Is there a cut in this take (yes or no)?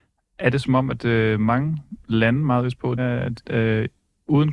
yes